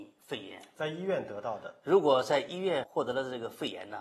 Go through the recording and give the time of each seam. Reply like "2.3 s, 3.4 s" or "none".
none

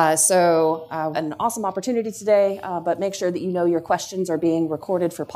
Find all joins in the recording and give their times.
1.1 s

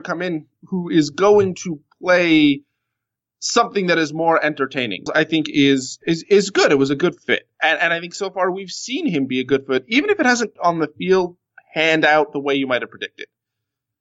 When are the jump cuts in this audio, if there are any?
5.1 s, 10.6 s

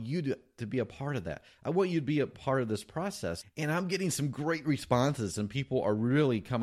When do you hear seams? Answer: 3.4 s

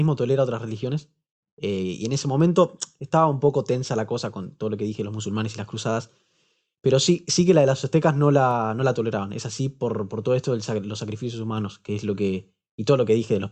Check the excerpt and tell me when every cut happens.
none

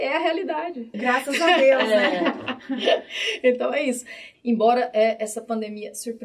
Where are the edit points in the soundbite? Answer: 0.9 s, 4.3 s

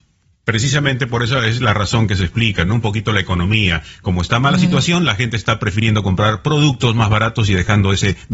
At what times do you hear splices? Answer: none

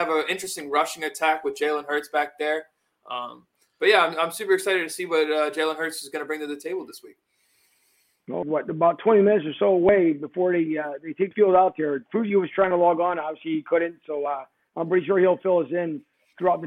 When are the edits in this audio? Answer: 8.4 s

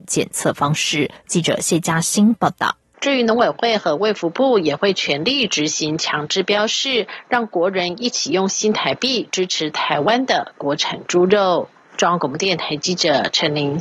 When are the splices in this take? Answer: 2.9 s

